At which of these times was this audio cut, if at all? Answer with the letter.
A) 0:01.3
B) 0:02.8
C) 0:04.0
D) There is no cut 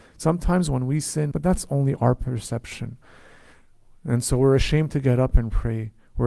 A